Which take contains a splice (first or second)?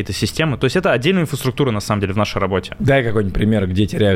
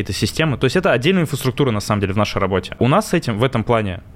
first